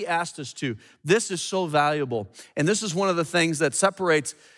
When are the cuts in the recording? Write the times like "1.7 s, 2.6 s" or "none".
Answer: none